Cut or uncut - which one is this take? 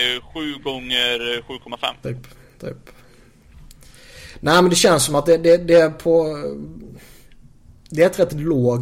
cut